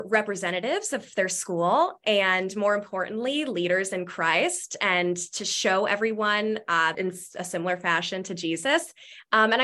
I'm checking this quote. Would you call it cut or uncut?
cut